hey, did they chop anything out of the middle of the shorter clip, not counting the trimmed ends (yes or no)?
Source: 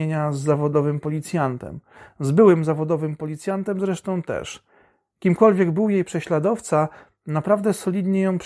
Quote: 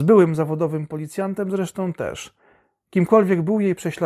no